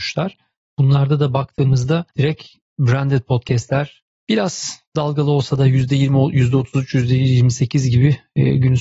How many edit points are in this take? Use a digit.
0